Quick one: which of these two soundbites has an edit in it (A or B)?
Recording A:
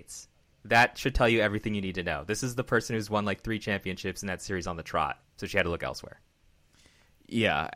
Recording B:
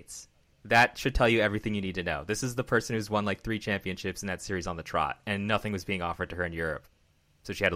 A